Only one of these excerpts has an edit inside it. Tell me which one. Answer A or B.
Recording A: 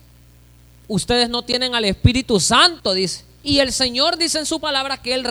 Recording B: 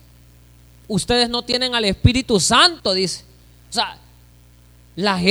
A